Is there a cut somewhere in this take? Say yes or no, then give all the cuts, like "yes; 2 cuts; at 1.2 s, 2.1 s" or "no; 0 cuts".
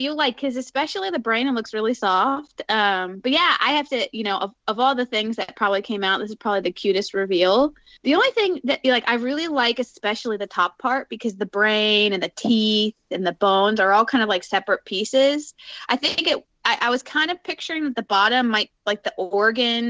no; 0 cuts